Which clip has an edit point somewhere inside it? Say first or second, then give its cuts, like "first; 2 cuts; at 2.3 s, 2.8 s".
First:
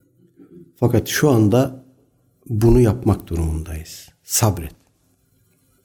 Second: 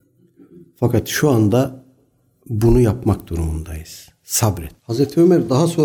second; 1 cut; at 4.8 s